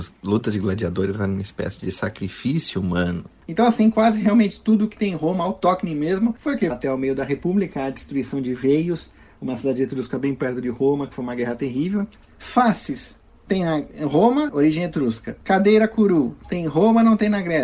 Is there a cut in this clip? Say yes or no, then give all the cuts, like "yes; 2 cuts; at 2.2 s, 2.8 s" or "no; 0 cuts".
yes; 3 cuts; at 6.7 s, 12.2 s, 14.5 s